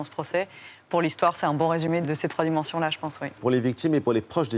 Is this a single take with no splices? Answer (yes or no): no